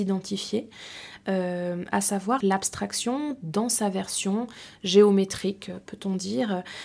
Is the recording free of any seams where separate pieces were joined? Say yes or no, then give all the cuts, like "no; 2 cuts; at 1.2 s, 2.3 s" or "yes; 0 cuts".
no; 1 cut; at 2.4 s